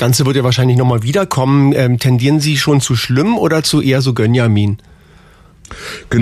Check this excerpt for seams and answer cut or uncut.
uncut